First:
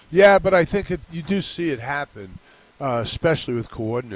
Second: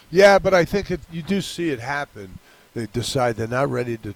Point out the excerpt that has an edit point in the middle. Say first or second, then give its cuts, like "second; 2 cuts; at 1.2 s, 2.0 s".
second; 1 cut; at 2.7 s